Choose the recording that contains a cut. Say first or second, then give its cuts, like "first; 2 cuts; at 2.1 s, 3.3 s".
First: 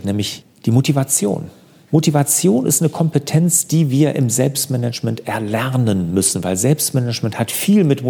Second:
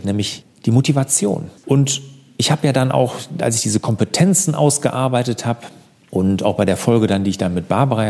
second; 1 cut; at 1.6 s